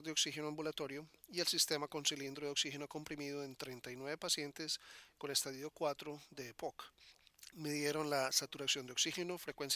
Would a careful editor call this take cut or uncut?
cut